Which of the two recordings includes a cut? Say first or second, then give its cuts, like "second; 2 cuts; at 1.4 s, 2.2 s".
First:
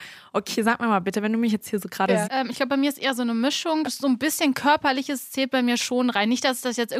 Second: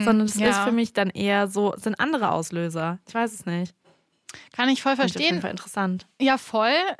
first; 2 cuts; at 2.2 s, 3.8 s